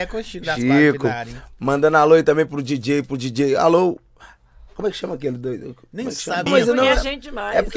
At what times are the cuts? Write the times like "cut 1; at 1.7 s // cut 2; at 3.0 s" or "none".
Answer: cut 1; at 6.5 s